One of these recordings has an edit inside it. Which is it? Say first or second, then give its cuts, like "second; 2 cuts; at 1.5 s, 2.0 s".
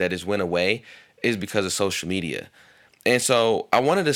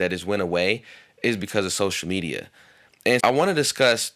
second; 1 cut; at 3.2 s